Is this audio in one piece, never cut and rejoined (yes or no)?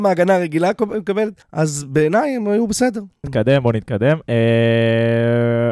no